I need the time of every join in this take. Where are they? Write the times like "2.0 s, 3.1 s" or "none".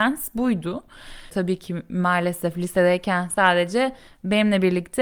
1.3 s